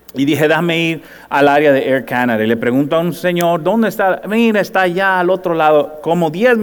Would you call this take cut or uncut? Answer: uncut